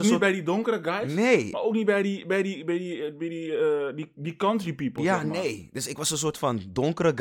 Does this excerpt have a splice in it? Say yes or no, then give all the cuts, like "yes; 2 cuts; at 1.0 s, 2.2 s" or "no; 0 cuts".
no; 0 cuts